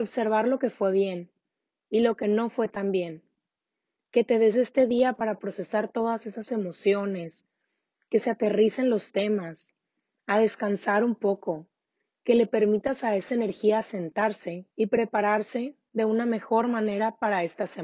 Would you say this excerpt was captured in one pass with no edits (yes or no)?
no